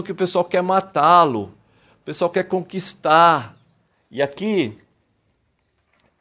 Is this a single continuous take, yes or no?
no